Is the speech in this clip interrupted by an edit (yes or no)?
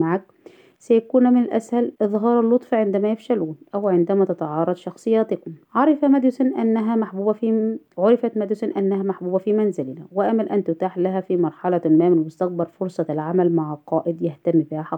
yes